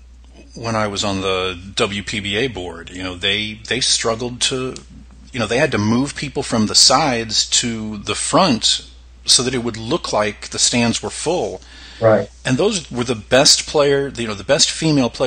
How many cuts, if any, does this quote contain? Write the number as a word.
zero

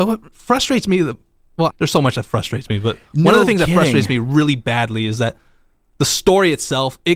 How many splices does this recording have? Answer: one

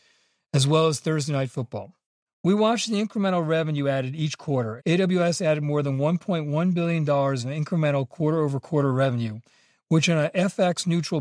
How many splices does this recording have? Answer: two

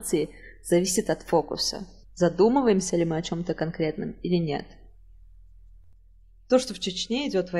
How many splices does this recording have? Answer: zero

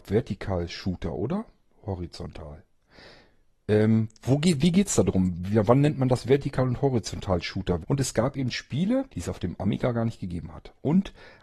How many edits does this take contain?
two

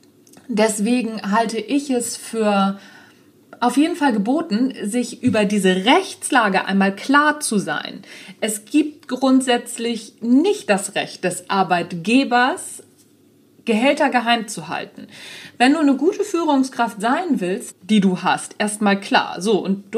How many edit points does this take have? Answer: one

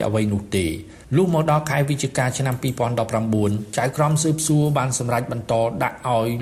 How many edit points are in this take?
one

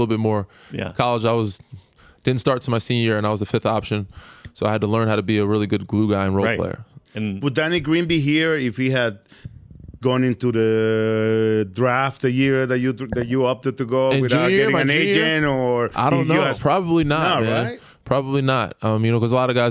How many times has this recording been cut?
one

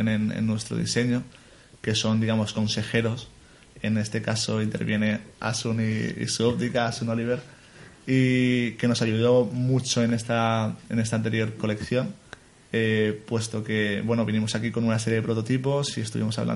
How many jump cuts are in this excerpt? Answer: zero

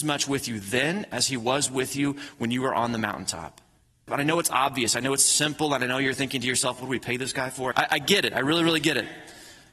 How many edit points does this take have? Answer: two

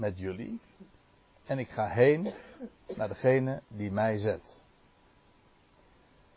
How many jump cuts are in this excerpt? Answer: zero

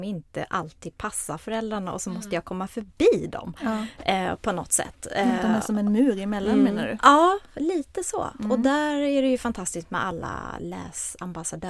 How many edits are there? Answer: zero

